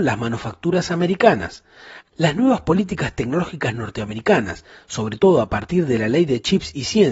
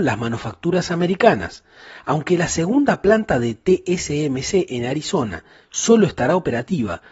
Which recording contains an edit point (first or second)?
first